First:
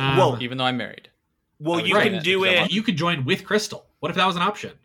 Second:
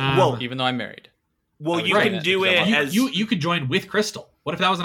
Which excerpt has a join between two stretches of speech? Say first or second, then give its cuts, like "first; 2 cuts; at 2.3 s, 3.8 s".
first; 1 cut; at 2.7 s